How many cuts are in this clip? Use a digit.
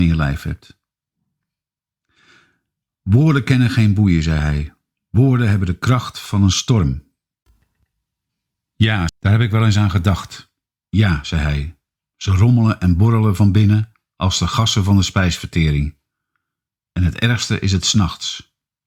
2